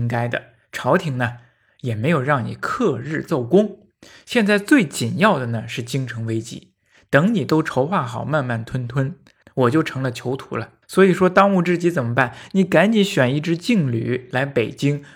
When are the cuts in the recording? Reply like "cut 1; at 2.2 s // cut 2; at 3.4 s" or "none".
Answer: cut 1; at 9.4 s // cut 2; at 10.8 s